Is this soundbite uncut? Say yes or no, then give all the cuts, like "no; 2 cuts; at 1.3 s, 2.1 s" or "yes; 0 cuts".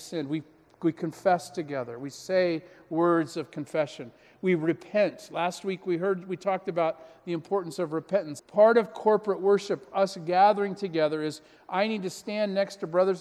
no; 1 cut; at 8.4 s